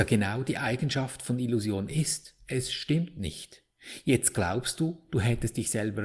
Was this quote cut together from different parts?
no; 0 cuts

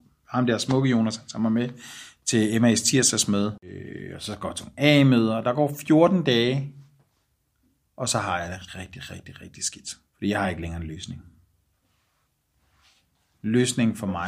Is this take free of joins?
no; 2 cuts; at 8.7 s, 10.1 s

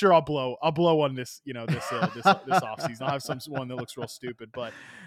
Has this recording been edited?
no; 0 cuts

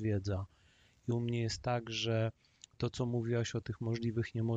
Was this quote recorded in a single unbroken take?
yes; 0 cuts

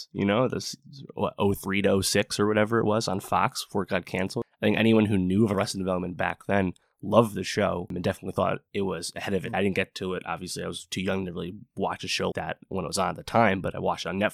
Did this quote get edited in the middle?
yes; 2 cuts; at 9.5 s, 12.3 s

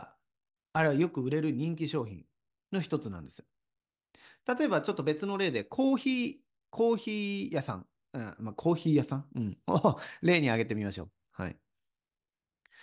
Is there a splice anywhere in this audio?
yes; 1 cut; at 11.3 s

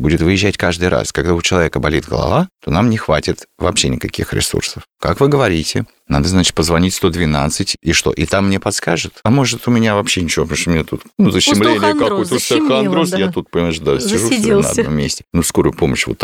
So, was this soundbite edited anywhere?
no; 0 cuts

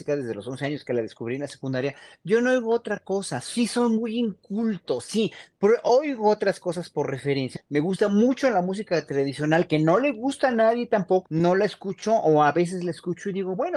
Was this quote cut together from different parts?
yes; 2 cuts; at 7.6 s, 11.3 s

